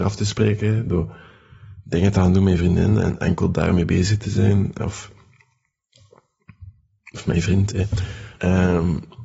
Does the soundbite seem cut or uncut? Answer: cut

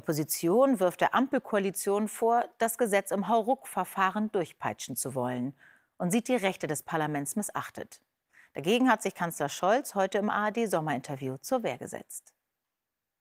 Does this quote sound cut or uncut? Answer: uncut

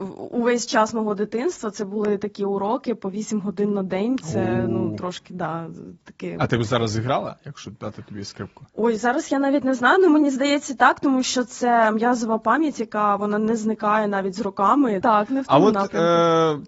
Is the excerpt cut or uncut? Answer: cut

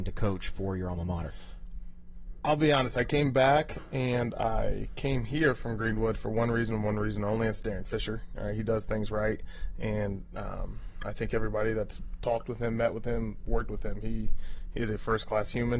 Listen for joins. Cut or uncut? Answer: uncut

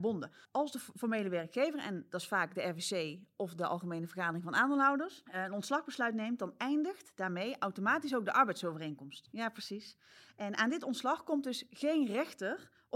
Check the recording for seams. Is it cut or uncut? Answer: cut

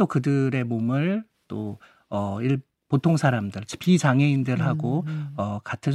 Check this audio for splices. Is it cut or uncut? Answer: uncut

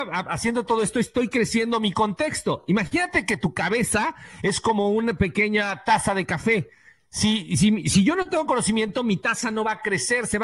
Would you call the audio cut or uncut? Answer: uncut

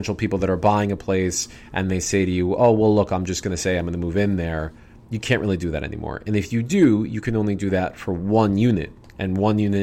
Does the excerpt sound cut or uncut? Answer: uncut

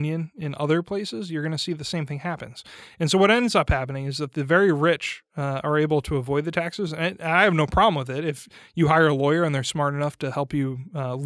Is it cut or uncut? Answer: uncut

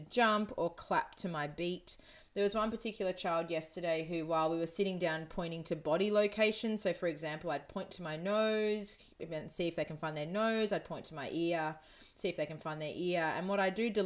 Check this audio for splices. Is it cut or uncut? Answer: uncut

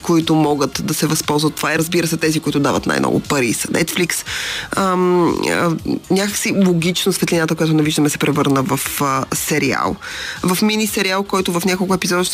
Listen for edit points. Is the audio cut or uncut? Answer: uncut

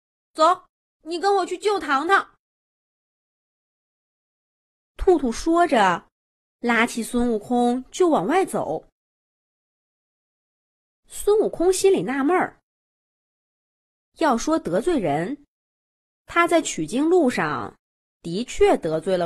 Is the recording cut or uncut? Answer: uncut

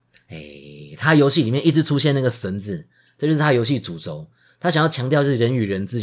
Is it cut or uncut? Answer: cut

